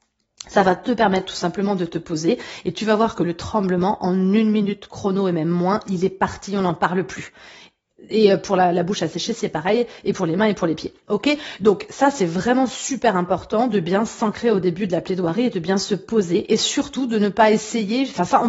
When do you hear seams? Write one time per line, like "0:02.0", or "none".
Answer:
none